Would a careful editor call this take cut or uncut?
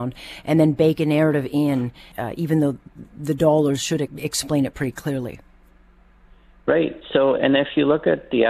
cut